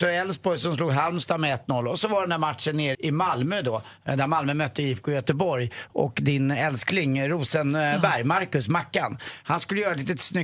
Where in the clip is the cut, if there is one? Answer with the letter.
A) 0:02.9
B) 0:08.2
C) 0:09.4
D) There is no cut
A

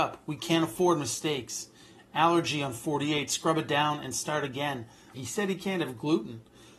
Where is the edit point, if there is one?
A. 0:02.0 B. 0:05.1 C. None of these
B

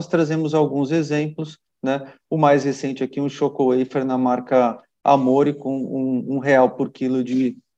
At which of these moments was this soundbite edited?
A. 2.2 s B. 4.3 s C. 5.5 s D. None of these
D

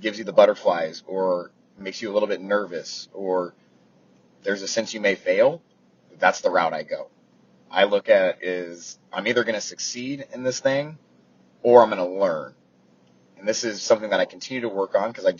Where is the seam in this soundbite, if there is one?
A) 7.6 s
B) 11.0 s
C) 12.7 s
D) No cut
D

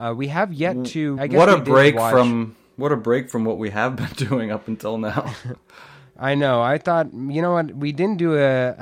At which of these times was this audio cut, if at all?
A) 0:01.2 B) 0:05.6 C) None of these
A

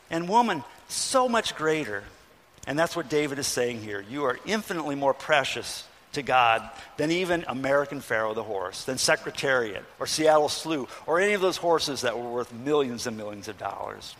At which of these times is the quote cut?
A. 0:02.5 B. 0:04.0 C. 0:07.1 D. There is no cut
D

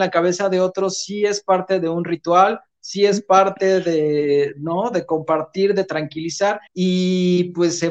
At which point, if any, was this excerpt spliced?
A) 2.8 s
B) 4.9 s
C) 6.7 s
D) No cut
C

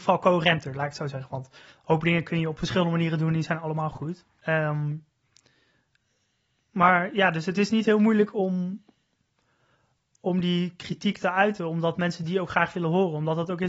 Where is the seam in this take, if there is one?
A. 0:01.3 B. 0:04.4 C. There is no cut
B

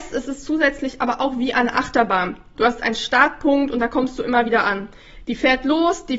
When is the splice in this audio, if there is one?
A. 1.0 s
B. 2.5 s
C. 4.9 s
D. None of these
B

